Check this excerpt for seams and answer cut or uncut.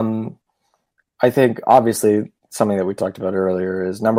uncut